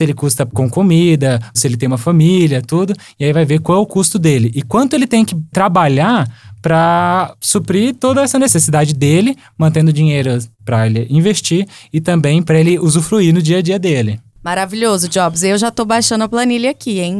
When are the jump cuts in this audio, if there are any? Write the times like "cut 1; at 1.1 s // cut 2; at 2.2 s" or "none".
cut 1; at 1.5 s